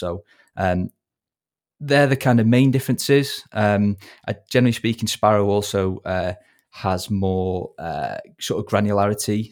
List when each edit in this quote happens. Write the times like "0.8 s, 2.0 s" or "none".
none